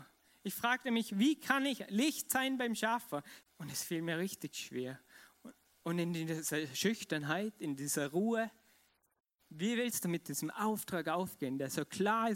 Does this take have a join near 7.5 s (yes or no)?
no